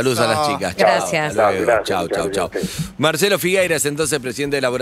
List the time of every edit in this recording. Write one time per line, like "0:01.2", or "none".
none